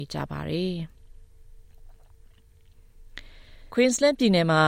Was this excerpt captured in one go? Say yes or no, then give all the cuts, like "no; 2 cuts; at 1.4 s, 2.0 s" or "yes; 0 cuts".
no; 1 cut; at 3.7 s